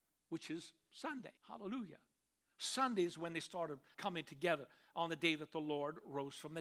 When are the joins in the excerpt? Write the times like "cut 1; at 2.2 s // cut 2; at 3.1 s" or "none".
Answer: cut 1; at 1.4 s // cut 2; at 3.9 s